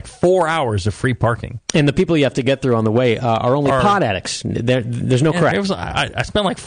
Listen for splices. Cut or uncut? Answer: cut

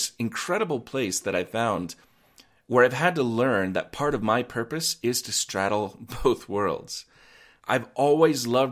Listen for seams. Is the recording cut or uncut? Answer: cut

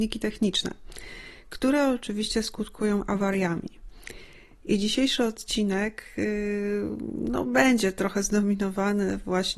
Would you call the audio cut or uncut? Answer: uncut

